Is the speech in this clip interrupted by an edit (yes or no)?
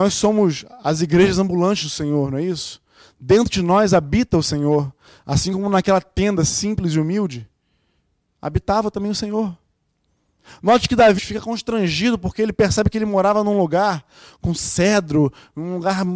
yes